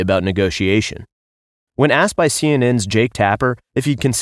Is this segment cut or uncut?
cut